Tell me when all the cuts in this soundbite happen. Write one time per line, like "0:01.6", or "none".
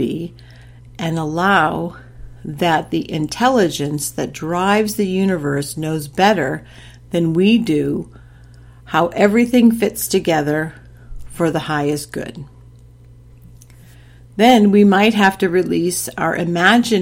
none